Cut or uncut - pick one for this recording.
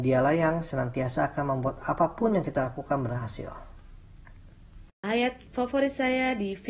uncut